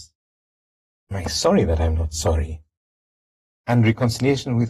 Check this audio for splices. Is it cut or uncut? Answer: cut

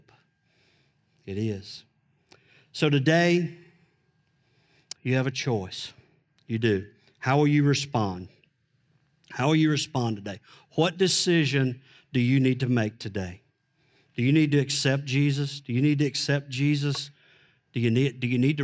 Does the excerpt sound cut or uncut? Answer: uncut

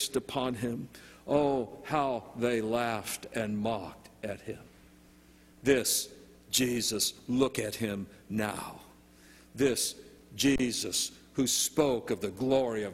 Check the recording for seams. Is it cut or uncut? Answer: uncut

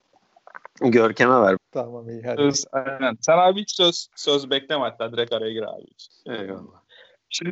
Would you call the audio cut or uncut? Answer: cut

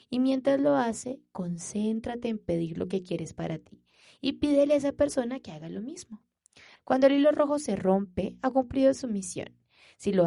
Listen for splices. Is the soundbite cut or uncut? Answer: cut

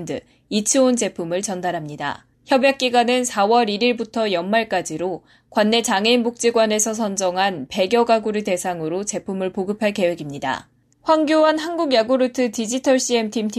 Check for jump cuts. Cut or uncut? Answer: cut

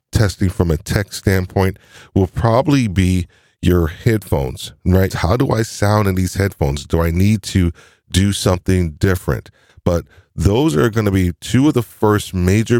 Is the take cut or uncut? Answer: cut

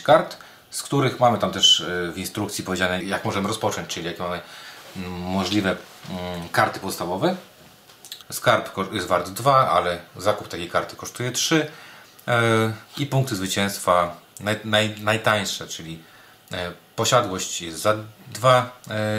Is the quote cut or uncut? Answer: cut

